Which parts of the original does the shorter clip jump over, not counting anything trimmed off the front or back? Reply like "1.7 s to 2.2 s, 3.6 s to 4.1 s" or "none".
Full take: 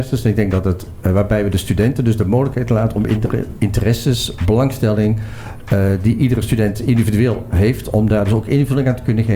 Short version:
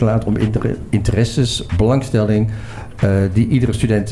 none